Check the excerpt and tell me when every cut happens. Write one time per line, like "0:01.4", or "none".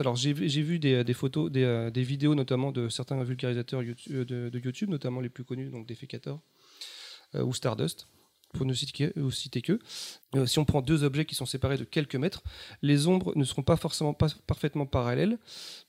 0:10.2